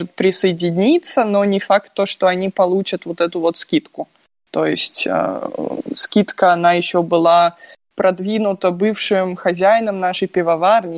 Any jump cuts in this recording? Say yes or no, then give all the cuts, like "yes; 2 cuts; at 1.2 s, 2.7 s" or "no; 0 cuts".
no; 0 cuts